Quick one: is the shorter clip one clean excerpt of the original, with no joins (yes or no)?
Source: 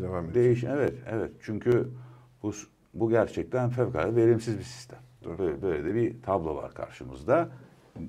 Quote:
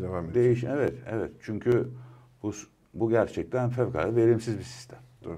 yes